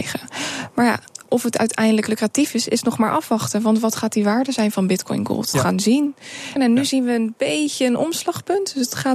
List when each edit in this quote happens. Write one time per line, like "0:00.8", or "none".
0:05.5
0:06.6